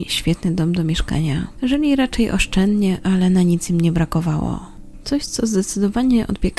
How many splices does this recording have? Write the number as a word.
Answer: one